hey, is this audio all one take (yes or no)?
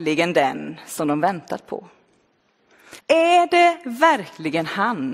no